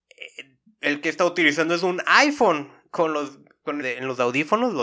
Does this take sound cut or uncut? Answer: cut